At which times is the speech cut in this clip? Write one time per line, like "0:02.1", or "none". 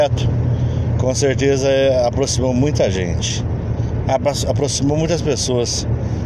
none